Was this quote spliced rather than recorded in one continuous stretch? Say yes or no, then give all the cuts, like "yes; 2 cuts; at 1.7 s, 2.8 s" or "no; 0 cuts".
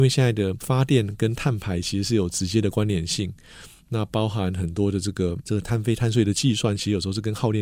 no; 0 cuts